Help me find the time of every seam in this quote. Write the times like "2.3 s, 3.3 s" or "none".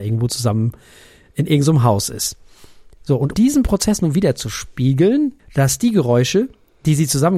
3.3 s, 5.4 s